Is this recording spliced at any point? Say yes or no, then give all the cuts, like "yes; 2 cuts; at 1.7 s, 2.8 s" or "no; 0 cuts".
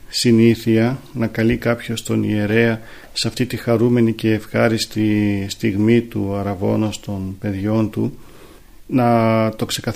no; 0 cuts